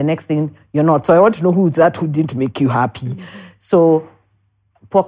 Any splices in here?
no; 0 cuts

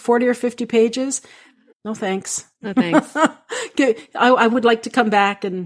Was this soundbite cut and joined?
yes; 1 cut; at 1.7 s

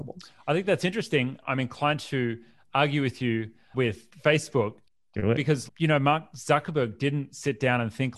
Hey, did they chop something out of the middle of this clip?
yes; 1 cut; at 5.7 s

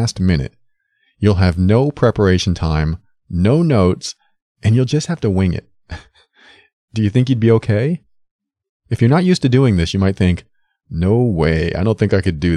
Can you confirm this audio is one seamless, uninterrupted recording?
yes; 0 cuts

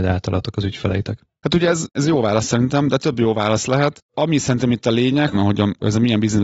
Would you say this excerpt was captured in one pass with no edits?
no; 2 cuts; at 3.0 s, 5.3 s

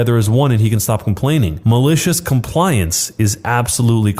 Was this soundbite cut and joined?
no; 0 cuts

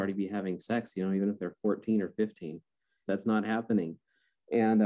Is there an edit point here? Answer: yes; 1 cut; at 3.1 s

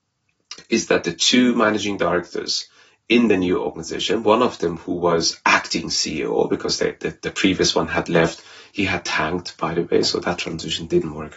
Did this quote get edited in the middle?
no; 0 cuts

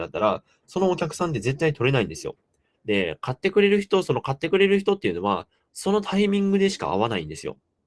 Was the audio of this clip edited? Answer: yes; 1 cut; at 2.7 s

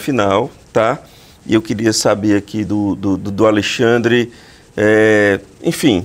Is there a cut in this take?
no; 0 cuts

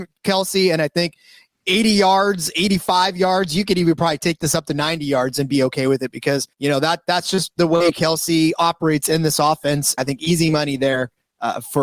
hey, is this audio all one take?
no; 2 cuts; at 6.5 s, 10.0 s

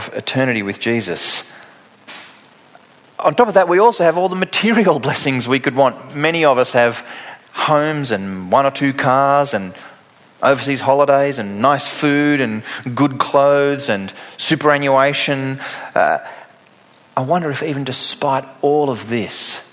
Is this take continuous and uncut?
yes; 0 cuts

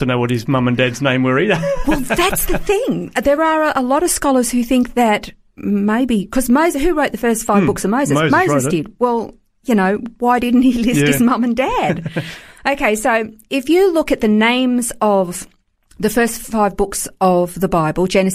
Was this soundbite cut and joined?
no; 0 cuts

